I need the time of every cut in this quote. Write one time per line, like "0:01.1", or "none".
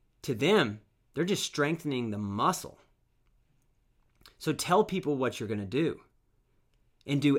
none